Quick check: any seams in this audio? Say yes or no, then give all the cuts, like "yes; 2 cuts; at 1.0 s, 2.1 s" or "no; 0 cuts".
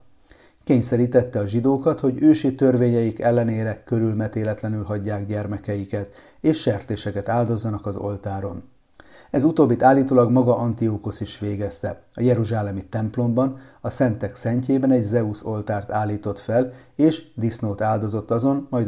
no; 0 cuts